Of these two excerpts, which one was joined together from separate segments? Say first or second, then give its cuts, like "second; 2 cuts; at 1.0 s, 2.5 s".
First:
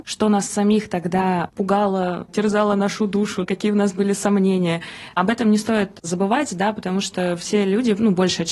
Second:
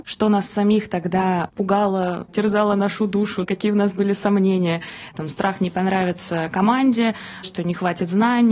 second; 2 cuts; at 5.1 s, 7.4 s